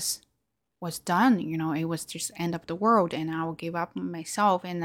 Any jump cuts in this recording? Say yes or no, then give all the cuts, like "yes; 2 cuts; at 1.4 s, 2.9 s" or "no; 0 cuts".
no; 0 cuts